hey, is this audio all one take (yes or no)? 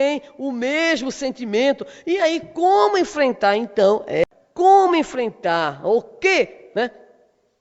yes